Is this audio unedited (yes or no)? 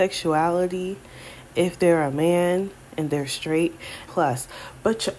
no